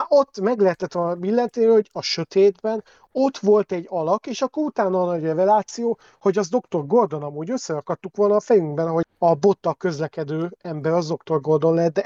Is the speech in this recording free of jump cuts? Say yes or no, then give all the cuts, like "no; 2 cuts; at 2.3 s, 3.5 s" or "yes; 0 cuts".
no; 1 cut; at 9.0 s